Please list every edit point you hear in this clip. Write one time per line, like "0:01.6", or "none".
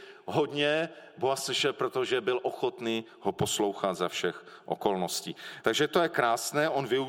0:05.6

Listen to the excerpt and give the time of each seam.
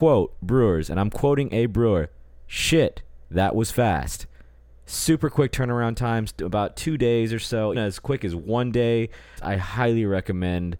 0:07.7
0:09.4

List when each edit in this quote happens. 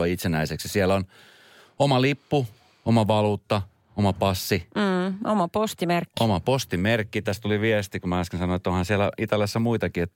none

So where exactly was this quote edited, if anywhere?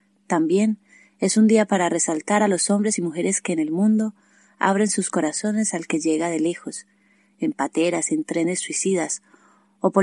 none

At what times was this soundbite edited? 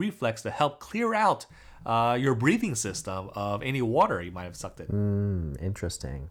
none

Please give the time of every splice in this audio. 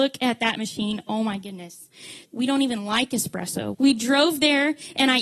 0:02.2
0:03.7

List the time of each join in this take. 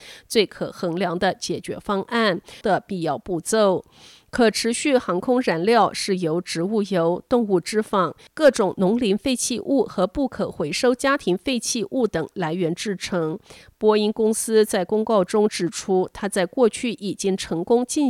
0:02.6

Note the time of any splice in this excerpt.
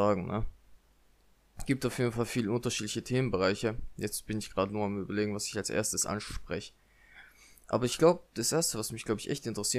none

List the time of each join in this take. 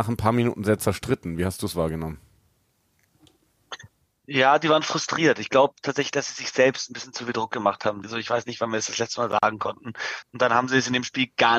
0:08.0
0:10.2

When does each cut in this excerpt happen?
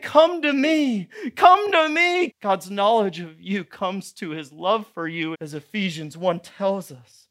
0:02.3
0:05.3

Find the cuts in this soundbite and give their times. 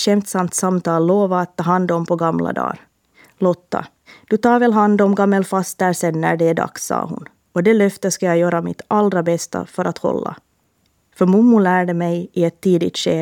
none

